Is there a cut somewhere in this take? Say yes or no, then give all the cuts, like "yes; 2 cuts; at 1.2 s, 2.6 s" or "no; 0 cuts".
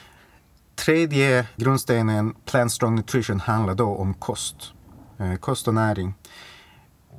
yes; 1 cut; at 1.6 s